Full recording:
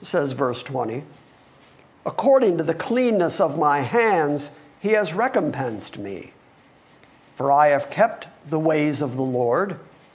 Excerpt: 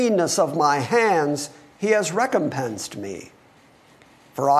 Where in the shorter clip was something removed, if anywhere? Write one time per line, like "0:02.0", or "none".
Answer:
none